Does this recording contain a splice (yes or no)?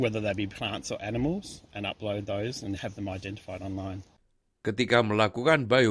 no